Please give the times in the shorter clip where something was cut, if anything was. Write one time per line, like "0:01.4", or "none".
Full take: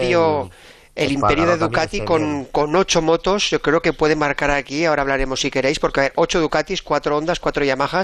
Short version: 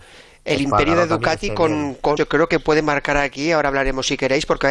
0:02.2